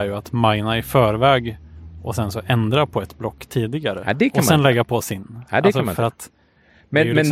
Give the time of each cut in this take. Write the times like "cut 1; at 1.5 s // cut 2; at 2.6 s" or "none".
none